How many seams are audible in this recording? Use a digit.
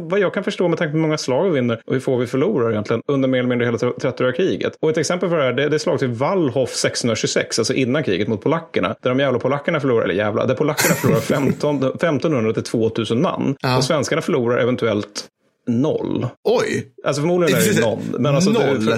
0